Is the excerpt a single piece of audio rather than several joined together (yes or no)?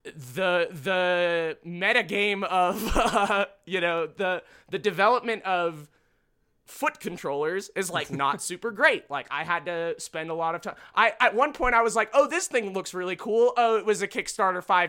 yes